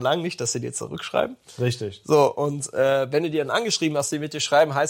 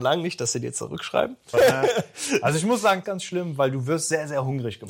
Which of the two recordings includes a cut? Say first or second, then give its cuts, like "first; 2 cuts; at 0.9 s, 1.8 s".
second; 2 cuts; at 1.5 s, 3.0 s